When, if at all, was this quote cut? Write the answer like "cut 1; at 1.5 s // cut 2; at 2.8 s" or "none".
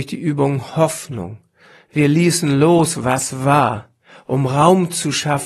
none